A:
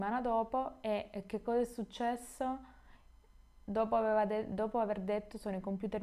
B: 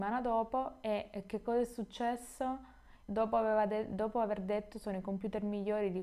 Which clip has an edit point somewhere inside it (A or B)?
B